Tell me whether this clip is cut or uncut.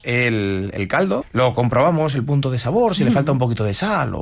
cut